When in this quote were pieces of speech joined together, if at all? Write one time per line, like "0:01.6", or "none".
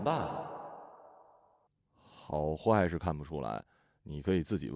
0:01.8

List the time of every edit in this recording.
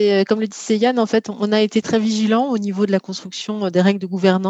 0:01.8

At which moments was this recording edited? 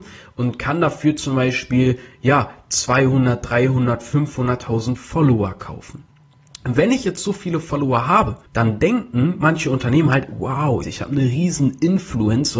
0:08.5
0:10.8

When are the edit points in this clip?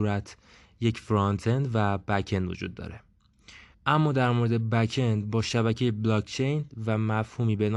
0:03.7

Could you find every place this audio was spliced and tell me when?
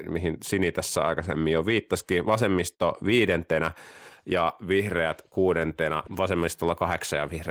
none

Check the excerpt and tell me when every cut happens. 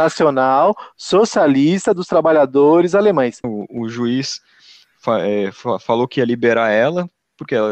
0:03.4

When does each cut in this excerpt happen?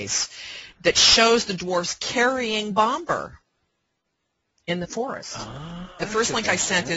0:06.0

